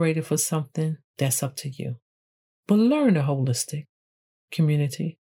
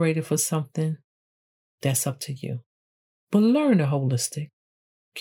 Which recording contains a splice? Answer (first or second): first